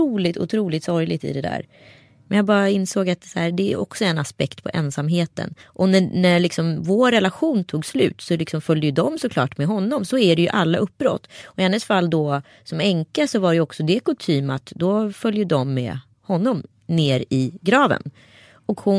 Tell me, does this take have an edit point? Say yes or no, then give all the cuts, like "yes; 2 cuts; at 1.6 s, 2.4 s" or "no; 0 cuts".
yes; 2 cuts; at 2.3 s, 5.6 s